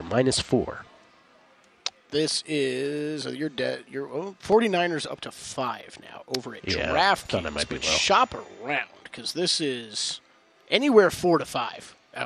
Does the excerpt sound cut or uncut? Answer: uncut